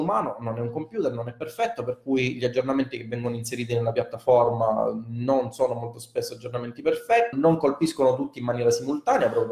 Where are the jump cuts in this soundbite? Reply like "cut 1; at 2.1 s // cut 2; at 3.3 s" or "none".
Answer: cut 1; at 7.3 s